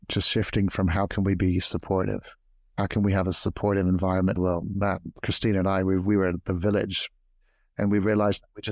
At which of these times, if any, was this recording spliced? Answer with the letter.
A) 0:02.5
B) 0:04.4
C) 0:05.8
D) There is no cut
B